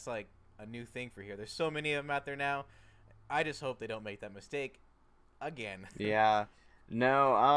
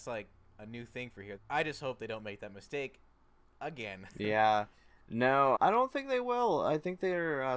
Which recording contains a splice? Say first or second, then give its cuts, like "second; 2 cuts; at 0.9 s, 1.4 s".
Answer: second; 2 cuts; at 1.4 s, 5.6 s